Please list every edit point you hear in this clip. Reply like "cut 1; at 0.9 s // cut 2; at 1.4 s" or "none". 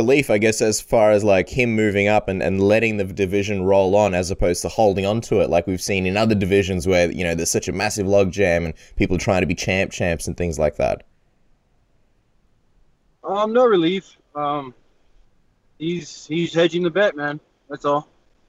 cut 1; at 14.2 s // cut 2; at 16.5 s